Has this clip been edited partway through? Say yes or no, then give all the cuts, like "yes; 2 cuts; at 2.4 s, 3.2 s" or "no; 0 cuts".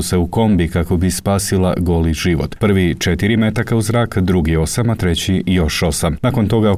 yes; 1 cut; at 2.6 s